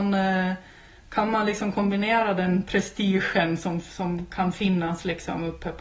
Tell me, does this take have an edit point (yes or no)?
no